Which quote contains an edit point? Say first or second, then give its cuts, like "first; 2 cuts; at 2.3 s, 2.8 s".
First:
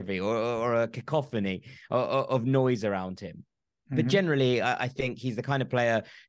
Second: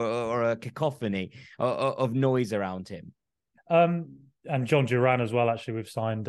second; 1 cut; at 3.6 s